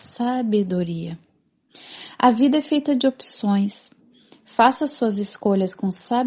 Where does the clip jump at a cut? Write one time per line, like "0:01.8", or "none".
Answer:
none